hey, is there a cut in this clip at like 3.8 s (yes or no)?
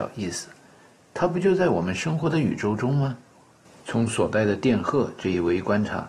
yes